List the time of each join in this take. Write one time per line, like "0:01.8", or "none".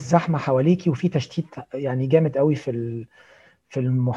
none